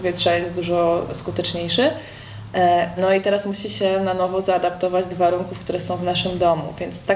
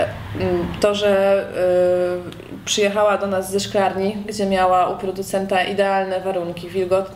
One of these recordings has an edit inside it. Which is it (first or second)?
first